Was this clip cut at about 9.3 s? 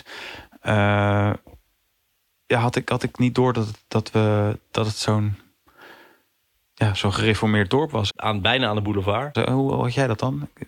yes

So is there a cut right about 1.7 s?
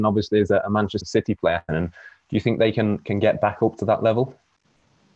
yes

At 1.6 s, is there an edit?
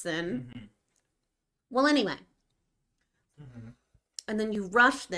no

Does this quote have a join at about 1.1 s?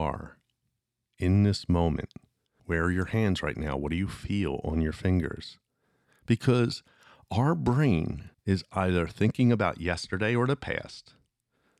no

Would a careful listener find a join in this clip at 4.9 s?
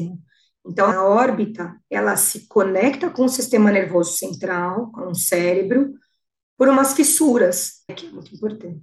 no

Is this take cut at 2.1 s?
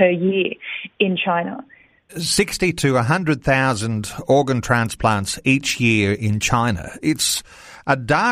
yes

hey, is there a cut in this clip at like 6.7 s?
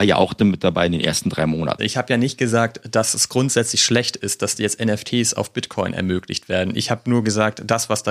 no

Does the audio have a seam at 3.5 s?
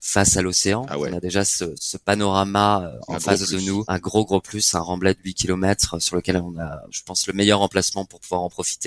no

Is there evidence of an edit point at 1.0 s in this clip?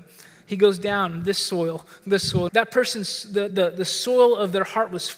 no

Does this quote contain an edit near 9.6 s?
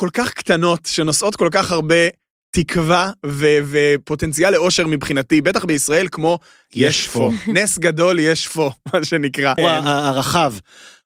yes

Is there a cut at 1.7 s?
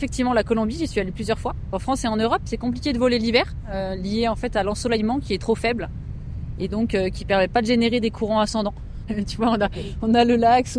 yes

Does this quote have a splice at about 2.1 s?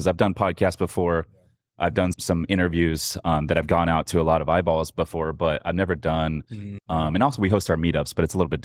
yes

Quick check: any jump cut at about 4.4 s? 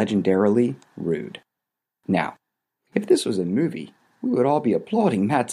no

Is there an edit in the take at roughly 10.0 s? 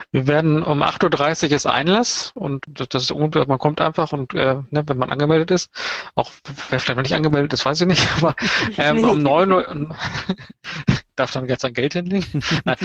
no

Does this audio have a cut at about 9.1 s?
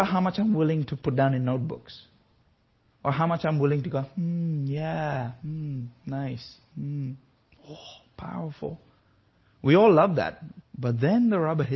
no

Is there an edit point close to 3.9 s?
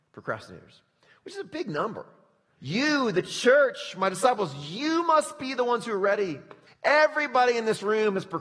no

